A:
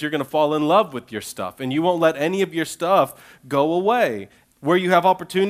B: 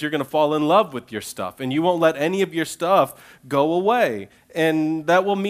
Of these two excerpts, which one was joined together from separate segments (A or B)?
A